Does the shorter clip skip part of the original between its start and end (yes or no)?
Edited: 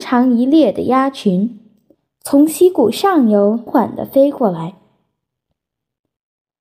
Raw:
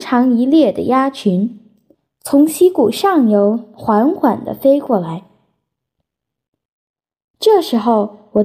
yes